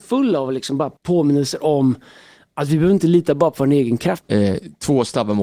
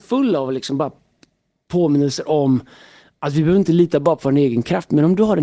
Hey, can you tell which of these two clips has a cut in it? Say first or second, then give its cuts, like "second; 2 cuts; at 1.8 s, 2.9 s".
first; 2 cuts; at 1.0 s, 4.2 s